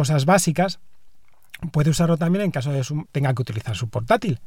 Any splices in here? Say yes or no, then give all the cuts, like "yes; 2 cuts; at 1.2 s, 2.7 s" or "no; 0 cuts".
yes; 1 cut; at 3.0 s